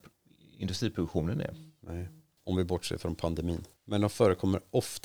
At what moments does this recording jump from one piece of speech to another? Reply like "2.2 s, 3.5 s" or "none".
3.7 s

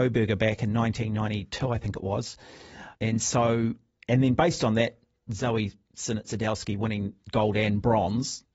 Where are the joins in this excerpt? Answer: 2.9 s

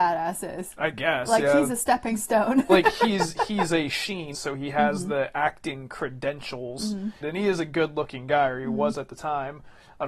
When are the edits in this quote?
4.3 s, 7.2 s

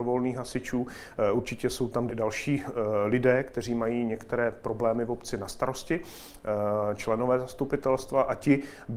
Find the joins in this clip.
2.1 s

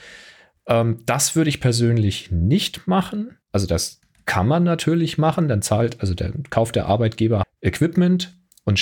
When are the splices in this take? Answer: 3.4 s, 7.4 s

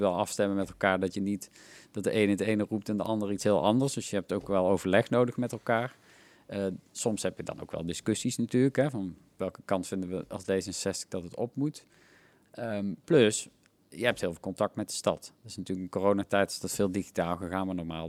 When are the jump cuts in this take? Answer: none

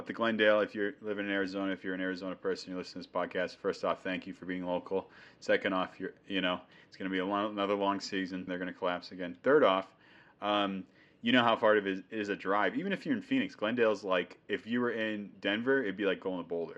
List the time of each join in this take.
8.5 s

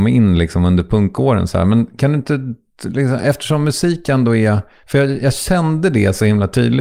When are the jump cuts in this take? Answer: none

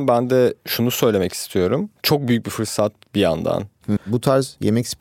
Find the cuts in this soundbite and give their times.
4.0 s

